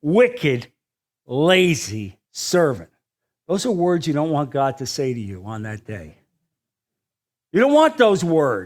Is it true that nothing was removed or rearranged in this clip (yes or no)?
no